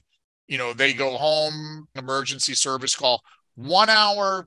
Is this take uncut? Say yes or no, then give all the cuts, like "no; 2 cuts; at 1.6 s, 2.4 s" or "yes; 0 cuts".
no; 1 cut; at 2.0 s